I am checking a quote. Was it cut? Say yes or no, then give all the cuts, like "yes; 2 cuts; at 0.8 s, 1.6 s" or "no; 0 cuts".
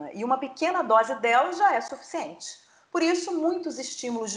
no; 0 cuts